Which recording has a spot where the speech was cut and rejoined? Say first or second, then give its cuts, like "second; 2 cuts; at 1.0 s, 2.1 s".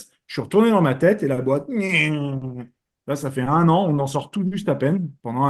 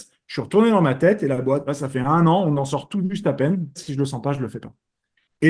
second; 2 cuts; at 1.7 s, 3.8 s